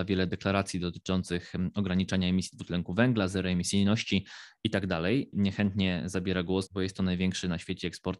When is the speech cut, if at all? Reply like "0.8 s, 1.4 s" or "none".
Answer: 5.3 s, 6.7 s

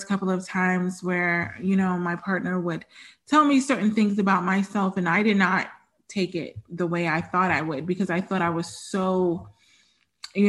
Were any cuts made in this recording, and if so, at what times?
none

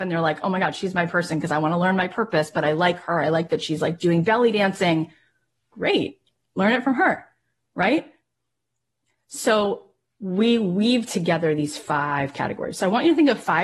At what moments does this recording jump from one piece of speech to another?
none

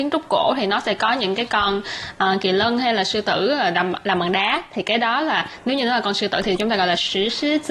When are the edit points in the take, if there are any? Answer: none

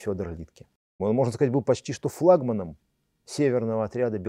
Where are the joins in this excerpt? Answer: 1.0 s

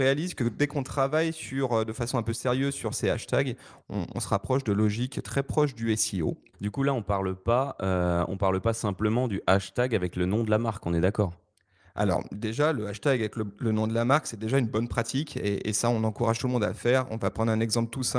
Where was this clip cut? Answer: 6.5 s

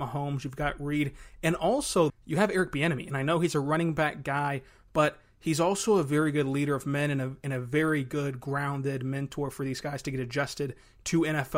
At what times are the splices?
2.1 s

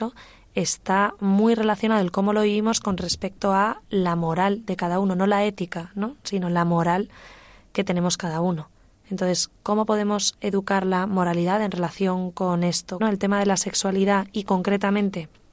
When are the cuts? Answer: 13.0 s

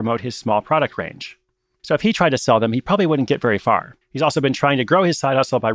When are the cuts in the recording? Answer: 1.8 s, 4.0 s

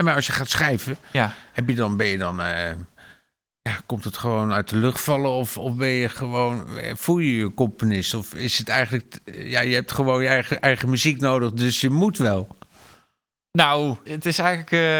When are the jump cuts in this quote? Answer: 14.1 s

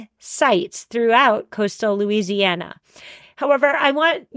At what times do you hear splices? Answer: 3.2 s

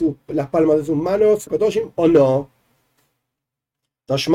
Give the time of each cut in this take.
1.5 s

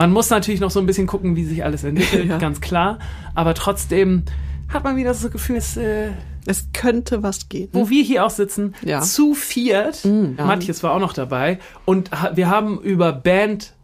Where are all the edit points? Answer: 5.5 s, 7.7 s, 10.4 s

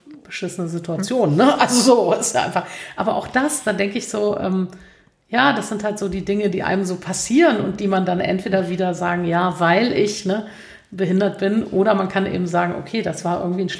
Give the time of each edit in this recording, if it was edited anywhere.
none

